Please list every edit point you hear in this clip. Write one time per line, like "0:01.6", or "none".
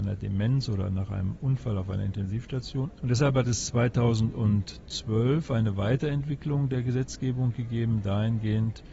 0:03.0

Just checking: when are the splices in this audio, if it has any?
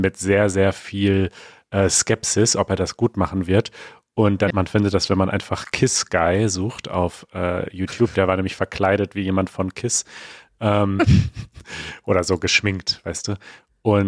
0:04.5

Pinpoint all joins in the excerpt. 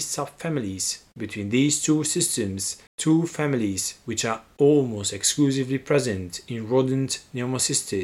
0:02.9

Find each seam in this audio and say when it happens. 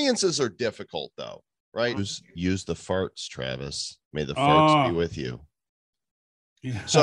0:02.0
0:04.0

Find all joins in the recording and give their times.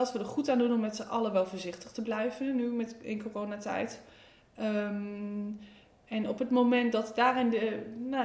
none

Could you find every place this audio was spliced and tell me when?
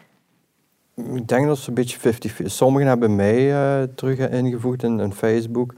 none

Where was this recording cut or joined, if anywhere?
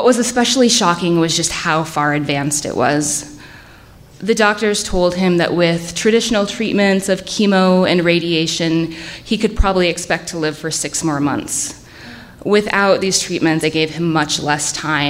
0:13.6

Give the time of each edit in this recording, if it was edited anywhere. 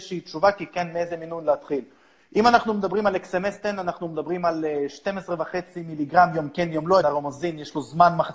0:07.0

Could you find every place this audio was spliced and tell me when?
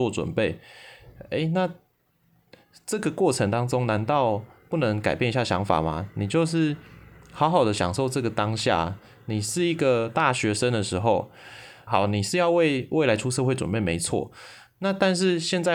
0:11.9

